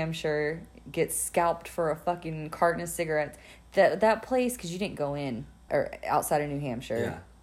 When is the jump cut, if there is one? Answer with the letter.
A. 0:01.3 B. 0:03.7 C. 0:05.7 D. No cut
C